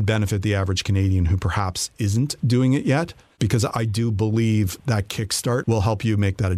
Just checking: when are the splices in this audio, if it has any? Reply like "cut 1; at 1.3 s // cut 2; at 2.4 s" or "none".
cut 1; at 5.6 s